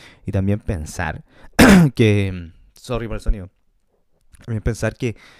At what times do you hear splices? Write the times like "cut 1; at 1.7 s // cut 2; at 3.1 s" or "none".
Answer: none